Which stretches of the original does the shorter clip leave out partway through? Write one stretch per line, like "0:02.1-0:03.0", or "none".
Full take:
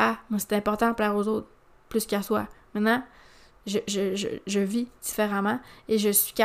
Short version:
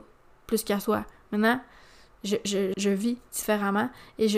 0:04.2-0:04.4